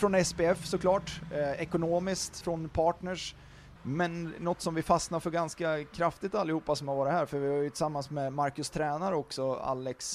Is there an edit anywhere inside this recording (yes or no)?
yes